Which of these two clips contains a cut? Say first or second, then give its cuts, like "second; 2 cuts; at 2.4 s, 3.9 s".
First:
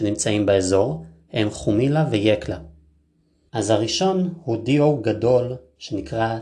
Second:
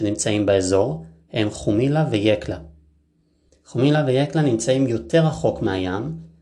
first; 1 cut; at 3.5 s